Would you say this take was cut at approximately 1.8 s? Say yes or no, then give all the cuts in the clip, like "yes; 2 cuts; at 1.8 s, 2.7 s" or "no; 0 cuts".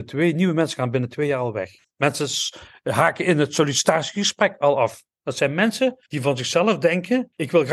yes; 1 cut; at 1.8 s